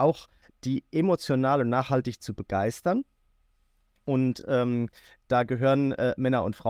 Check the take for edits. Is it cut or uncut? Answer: uncut